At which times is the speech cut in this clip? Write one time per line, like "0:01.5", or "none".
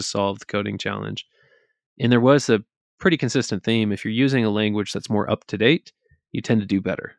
none